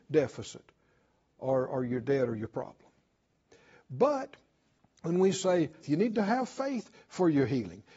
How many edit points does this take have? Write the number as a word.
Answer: one